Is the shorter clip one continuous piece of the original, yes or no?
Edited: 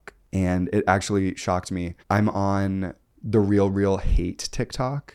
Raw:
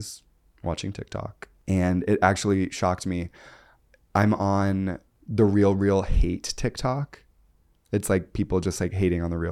no